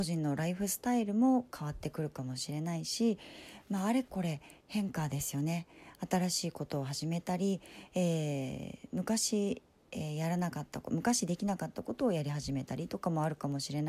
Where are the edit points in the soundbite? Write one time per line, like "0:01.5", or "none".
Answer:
none